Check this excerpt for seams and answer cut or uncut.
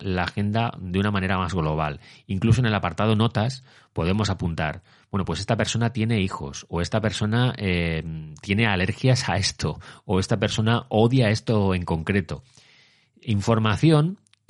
uncut